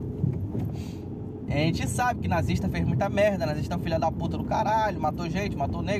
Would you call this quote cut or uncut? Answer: cut